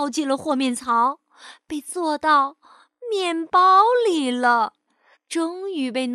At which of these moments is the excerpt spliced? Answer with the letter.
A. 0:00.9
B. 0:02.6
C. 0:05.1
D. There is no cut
C